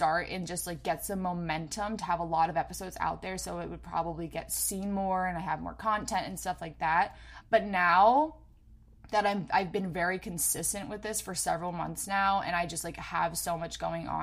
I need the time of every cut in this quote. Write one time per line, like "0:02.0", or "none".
0:07.4